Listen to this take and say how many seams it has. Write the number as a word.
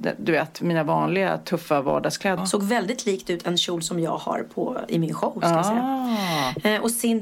one